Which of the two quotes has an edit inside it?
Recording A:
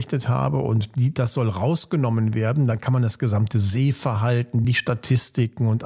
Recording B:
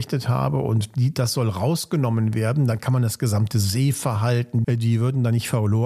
B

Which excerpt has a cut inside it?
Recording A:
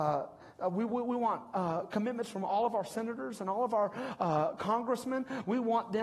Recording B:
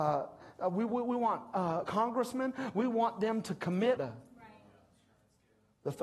B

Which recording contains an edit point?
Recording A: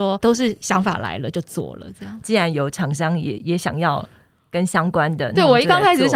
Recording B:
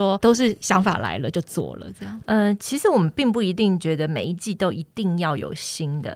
A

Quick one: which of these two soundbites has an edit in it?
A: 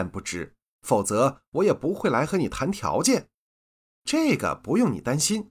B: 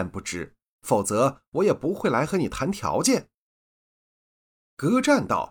A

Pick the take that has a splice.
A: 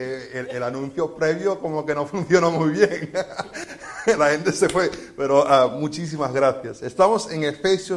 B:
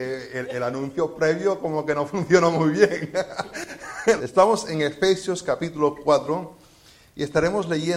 B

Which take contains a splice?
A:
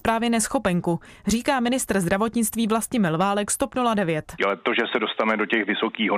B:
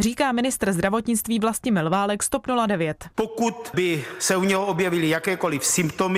A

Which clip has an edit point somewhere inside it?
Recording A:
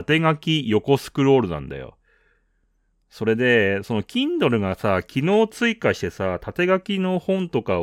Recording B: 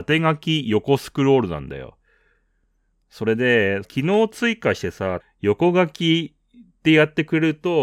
B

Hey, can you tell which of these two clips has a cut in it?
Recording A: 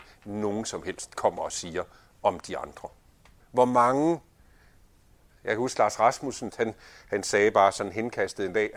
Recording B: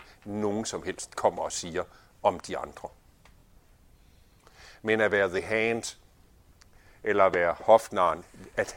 A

